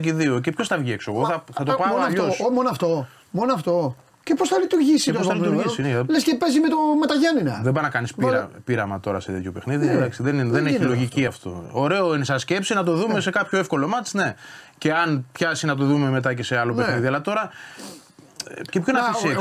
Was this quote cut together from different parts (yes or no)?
no